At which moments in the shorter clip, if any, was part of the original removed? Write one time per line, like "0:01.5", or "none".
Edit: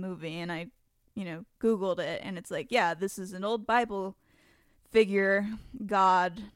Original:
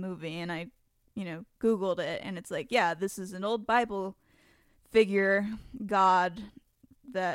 none